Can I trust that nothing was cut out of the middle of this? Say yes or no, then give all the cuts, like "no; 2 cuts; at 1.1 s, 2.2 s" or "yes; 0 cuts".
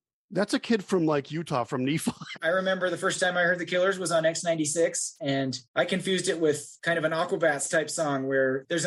no; 2 cuts; at 2.3 s, 5.6 s